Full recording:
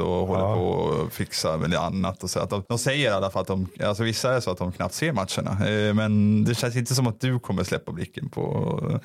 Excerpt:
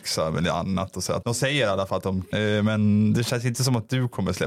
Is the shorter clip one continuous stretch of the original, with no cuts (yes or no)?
no